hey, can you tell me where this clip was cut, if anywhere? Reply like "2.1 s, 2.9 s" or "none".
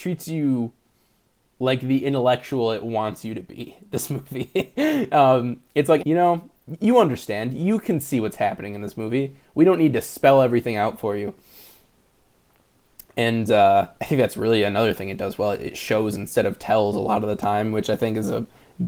6.0 s, 14.0 s

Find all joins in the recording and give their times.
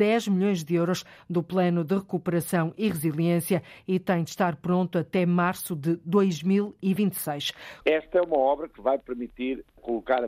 7.8 s

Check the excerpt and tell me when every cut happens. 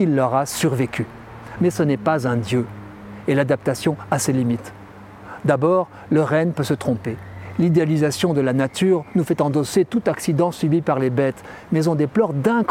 1.6 s

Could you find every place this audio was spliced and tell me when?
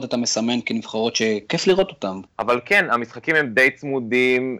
2.3 s

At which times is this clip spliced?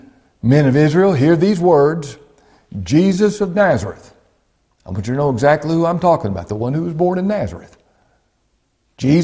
none

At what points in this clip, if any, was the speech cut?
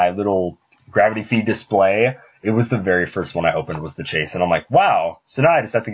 none

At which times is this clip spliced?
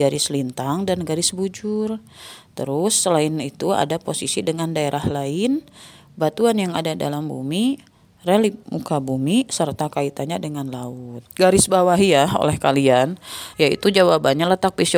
8.6 s, 11.3 s, 13.5 s

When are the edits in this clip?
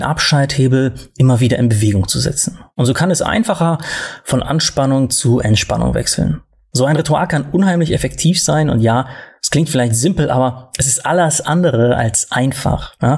none

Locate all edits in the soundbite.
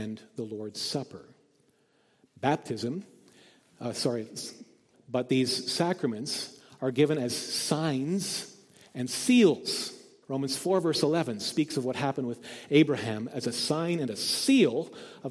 4.9 s, 10.2 s

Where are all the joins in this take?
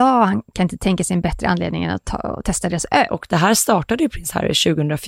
3.1 s

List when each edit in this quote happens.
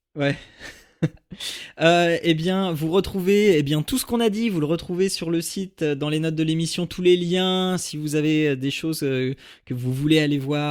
none

